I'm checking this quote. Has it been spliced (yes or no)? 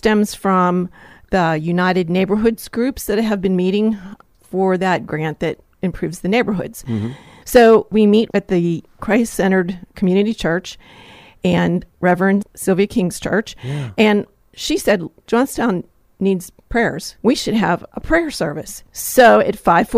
yes